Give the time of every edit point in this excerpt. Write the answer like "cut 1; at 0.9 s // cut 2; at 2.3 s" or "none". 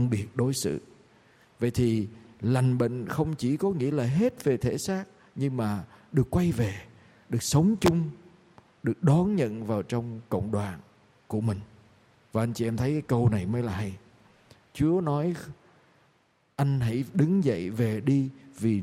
cut 1; at 12.2 s